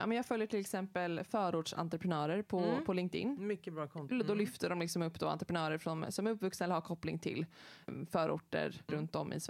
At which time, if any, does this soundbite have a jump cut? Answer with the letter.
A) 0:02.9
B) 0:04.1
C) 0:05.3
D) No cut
B